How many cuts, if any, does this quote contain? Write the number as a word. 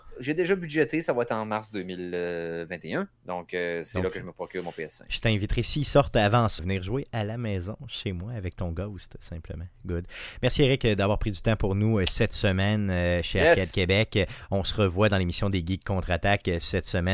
two